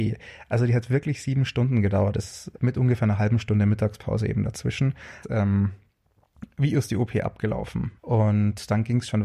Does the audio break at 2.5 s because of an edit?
yes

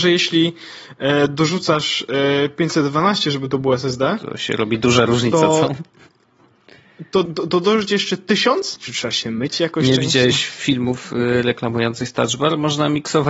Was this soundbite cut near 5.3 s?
no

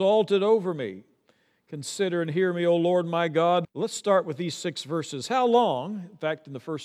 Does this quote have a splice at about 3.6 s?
yes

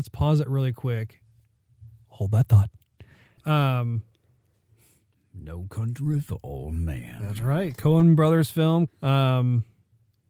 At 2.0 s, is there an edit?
no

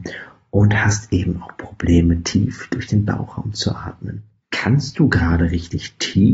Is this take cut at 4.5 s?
yes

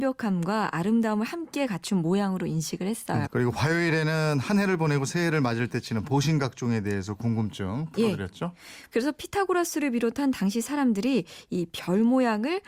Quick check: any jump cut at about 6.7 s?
no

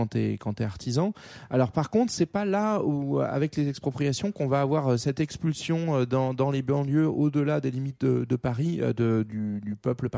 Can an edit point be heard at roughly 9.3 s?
yes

